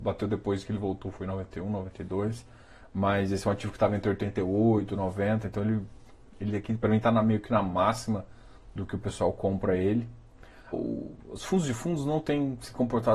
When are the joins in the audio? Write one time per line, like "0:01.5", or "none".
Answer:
0:10.7